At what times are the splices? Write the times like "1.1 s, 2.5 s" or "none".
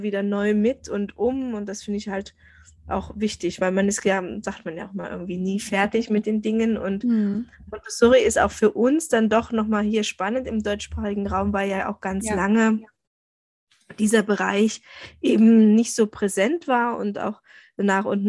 none